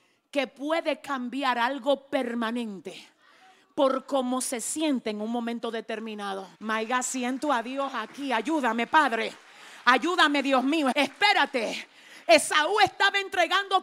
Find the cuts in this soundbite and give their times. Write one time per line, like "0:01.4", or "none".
0:06.5
0:10.9

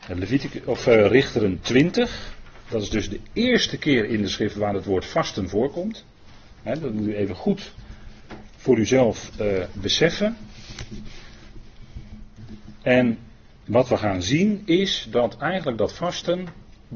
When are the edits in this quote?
none

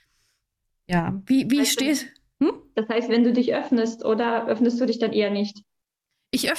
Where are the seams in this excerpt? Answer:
none

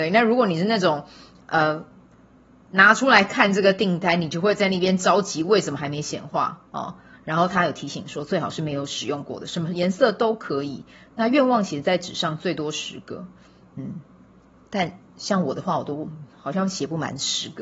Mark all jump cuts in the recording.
0:07.1

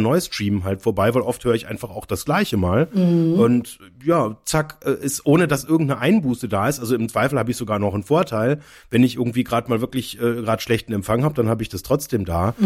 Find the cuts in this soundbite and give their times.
none

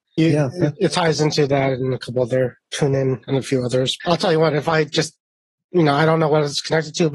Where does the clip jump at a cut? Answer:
0:04.0

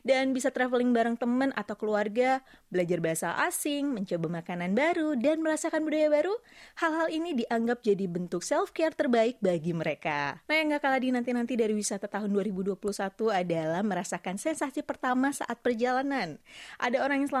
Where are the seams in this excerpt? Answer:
0:10.4

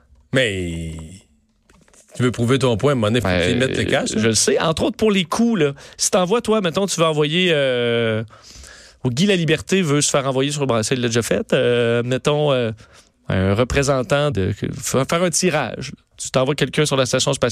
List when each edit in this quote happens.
0:03.2
0:14.3

